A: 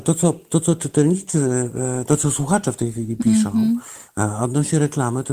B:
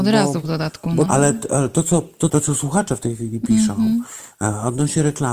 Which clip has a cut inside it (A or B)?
B